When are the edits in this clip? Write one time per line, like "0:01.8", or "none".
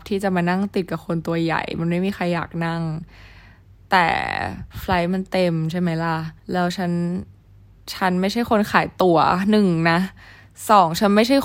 0:04.7
0:06.4